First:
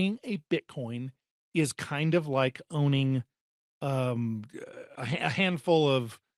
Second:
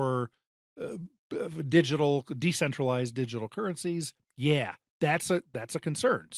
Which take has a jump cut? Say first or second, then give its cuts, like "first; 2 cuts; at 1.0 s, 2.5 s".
first; 1 cut; at 4.9 s